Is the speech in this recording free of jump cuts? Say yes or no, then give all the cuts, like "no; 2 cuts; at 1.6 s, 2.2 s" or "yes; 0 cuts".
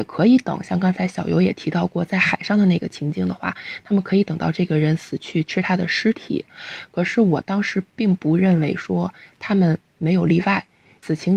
yes; 0 cuts